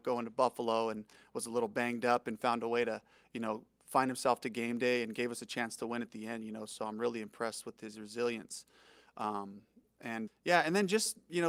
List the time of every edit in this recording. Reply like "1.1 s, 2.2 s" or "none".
10.3 s

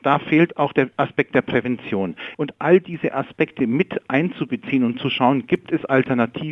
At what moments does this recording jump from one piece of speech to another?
2.3 s

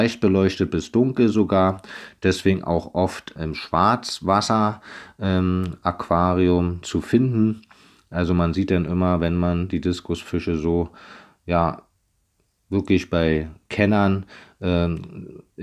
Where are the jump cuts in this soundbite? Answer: 3.4 s

